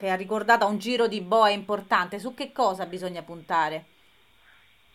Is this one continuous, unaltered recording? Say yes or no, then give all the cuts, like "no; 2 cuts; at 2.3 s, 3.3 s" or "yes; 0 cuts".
yes; 0 cuts